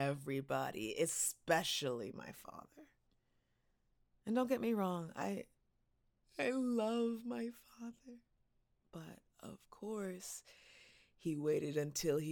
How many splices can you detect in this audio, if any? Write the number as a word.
zero